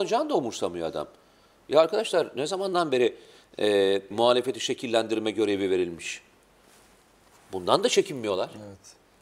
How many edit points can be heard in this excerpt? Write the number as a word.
one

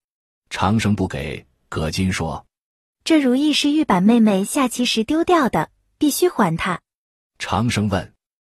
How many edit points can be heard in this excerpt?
zero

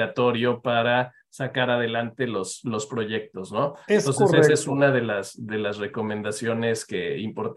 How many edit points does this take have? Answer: zero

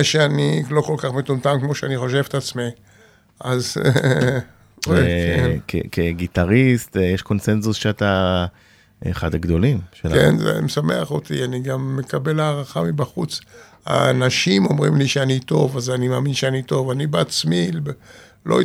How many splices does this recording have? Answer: one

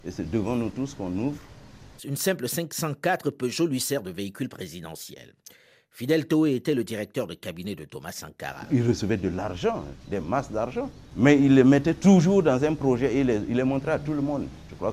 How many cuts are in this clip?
one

